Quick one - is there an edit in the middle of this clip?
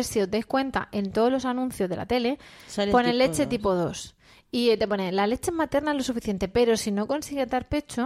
no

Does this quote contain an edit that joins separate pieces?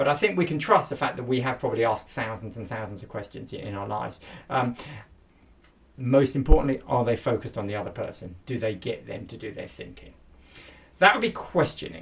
no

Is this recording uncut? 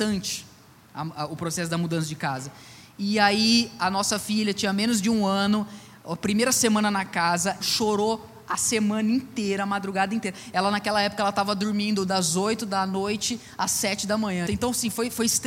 no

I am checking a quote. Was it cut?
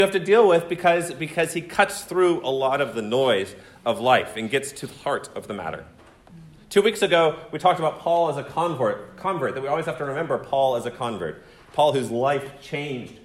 no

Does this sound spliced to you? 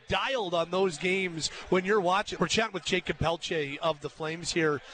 yes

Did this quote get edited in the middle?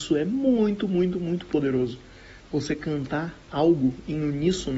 yes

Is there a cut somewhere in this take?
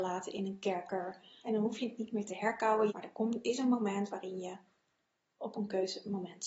yes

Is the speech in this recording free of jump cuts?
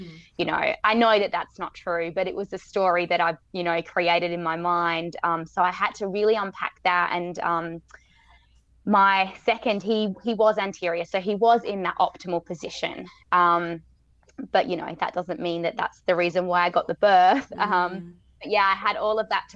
yes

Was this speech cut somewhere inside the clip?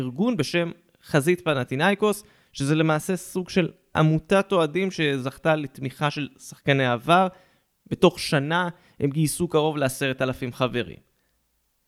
no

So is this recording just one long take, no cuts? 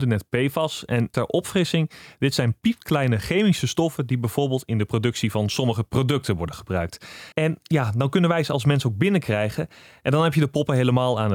no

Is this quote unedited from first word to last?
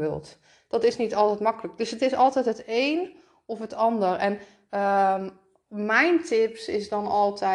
yes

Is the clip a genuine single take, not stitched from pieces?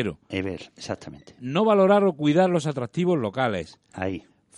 yes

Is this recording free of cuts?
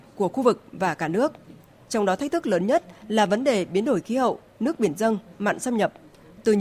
no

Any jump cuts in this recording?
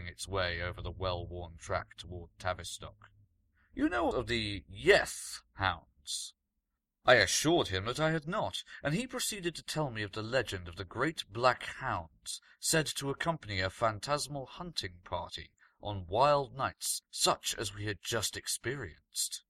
yes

